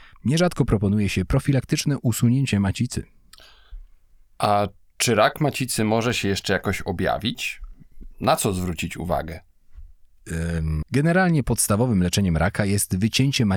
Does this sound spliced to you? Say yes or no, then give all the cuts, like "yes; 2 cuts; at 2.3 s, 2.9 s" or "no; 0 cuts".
yes; 1 cut; at 10.8 s